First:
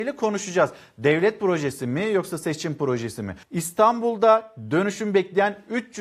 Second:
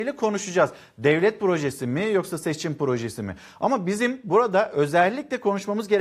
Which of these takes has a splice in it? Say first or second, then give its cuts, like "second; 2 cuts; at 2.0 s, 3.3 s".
first; 1 cut; at 3.4 s